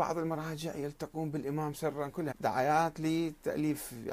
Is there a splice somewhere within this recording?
yes; 1 cut; at 2.3 s

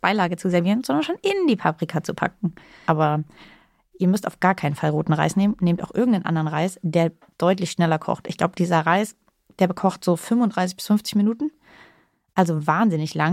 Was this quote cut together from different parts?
yes; 1 cut; at 2.8 s

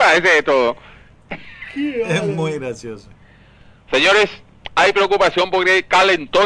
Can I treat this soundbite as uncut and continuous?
yes; 0 cuts

